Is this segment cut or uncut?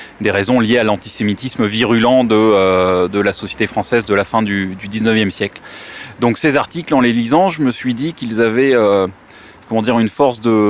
uncut